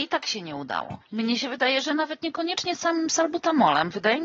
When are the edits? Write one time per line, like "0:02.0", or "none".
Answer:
0:01.0

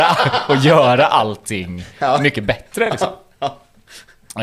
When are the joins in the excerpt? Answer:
none

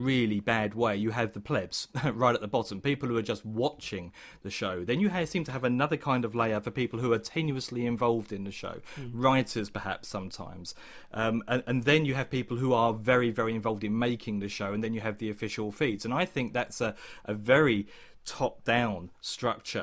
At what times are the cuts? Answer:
none

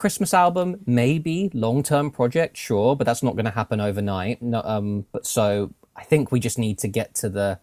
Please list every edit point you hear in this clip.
none

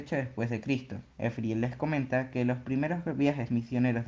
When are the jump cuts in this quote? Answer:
0:01.1

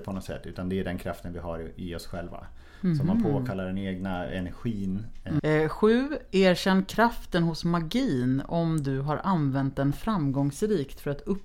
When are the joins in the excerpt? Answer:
0:05.4

